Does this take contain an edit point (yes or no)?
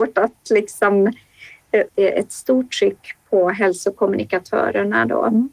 yes